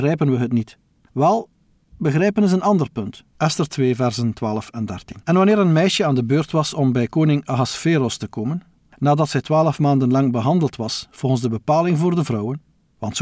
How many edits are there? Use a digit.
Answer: 2